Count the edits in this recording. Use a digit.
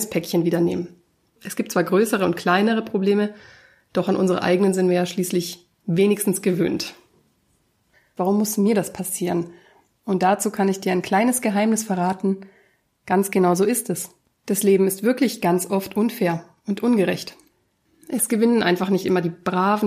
3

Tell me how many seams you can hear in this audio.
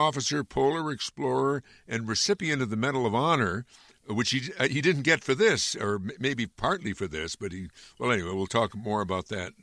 0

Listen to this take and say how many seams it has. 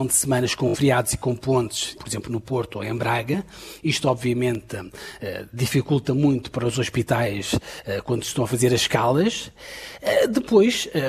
1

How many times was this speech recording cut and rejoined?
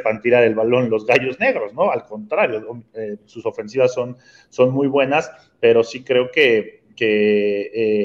0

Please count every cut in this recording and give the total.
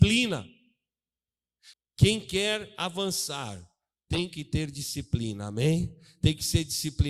1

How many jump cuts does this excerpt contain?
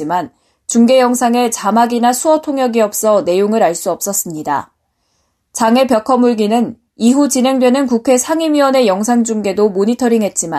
0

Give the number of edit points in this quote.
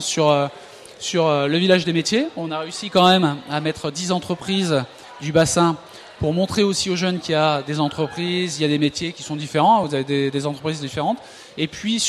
0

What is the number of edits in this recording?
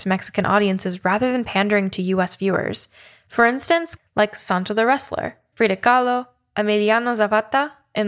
2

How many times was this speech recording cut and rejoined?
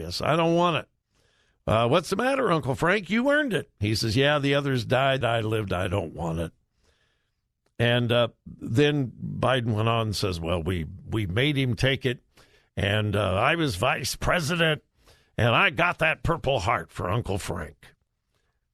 1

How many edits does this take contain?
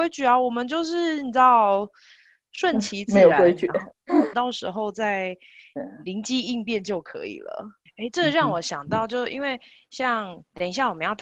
2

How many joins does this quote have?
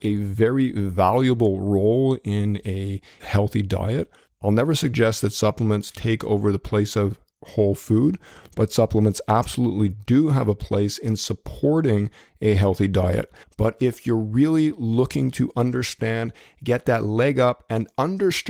2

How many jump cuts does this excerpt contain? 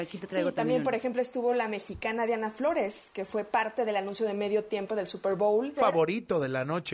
1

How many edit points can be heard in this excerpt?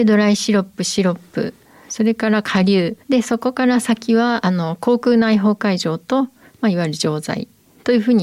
1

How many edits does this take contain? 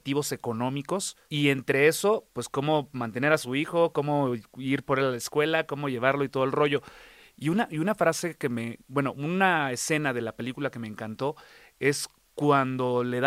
1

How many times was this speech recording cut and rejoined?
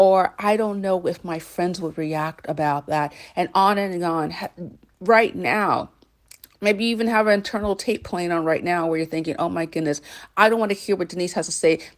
0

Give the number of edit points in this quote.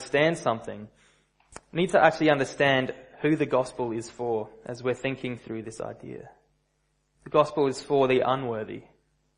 1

